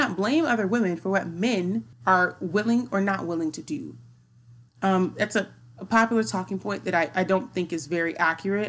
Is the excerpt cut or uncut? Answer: cut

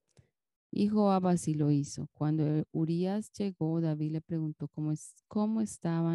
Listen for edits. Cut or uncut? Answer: uncut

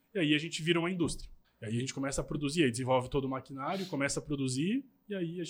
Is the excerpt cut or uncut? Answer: cut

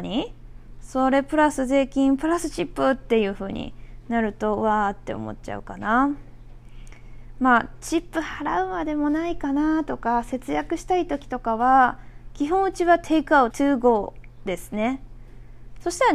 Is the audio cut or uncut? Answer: cut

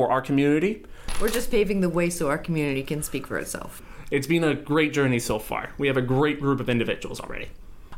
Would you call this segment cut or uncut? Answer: uncut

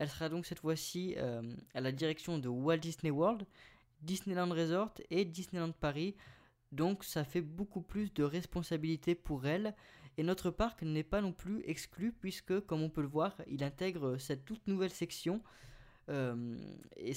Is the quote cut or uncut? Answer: uncut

